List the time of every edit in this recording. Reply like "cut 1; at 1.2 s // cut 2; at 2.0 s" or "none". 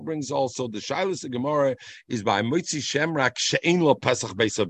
none